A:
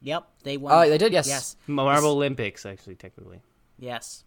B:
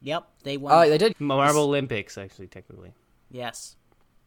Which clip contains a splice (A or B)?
B